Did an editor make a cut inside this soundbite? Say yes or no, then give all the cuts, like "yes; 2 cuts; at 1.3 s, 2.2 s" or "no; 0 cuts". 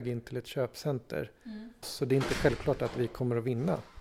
yes; 1 cut; at 1.8 s